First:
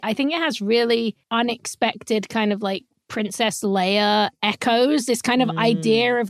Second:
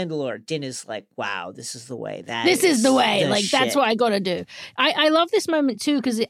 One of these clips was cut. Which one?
first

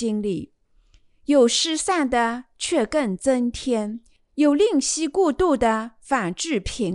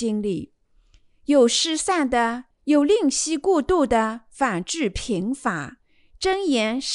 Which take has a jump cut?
second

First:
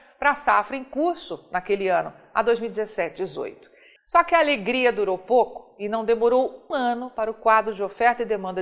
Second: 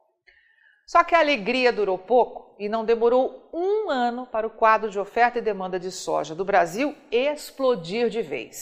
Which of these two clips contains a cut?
first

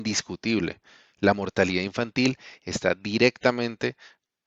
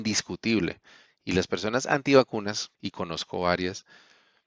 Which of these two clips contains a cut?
second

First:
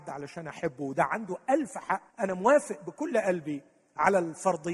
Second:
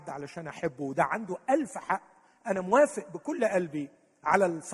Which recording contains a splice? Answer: first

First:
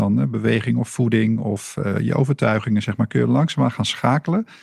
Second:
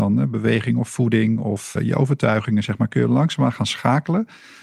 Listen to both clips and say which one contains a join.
second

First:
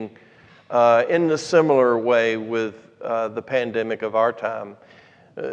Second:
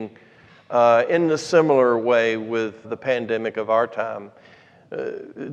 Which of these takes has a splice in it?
second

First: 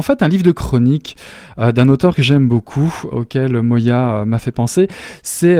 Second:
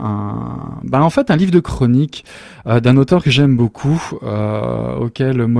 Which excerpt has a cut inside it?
first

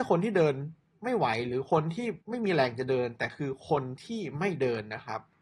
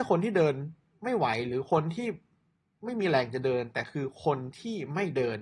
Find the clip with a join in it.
first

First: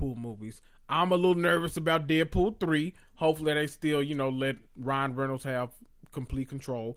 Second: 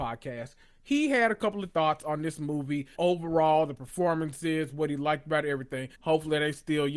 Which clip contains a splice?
second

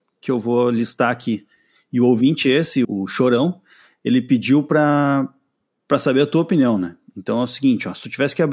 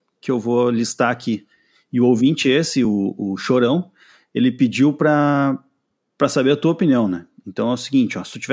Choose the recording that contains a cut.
first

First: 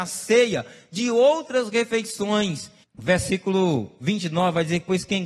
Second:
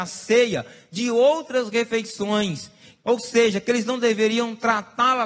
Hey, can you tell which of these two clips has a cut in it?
first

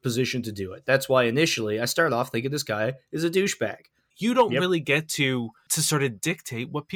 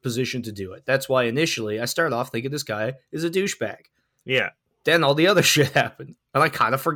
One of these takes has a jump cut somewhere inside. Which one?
first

